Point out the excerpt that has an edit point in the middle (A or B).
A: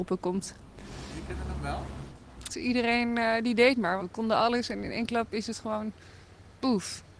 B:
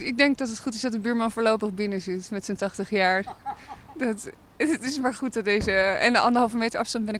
A